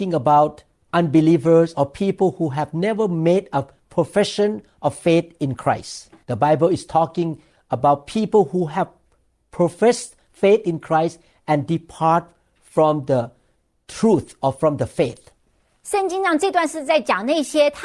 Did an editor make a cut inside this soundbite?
yes; 1 cut; at 6.2 s

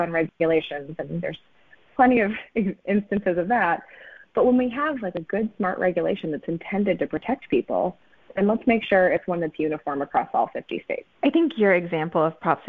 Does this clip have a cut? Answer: yes; 1 cut; at 11.1 s

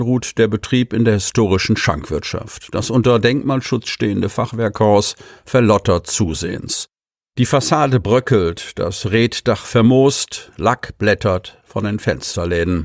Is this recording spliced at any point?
no; 0 cuts

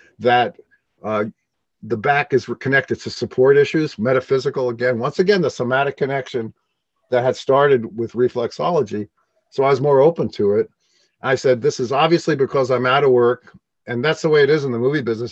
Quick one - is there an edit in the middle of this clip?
yes; 1 cut; at 7.9 s

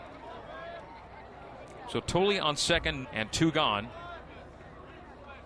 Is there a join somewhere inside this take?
yes; 1 cut; at 3.0 s

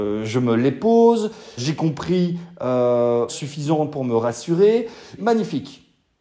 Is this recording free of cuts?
no; 3 cuts; at 1.6 s, 3.3 s, 5.2 s

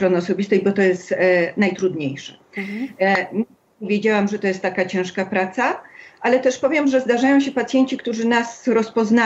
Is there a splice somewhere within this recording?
no; 0 cuts

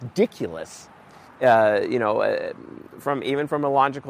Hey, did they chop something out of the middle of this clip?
yes; 1 cut; at 1.2 s

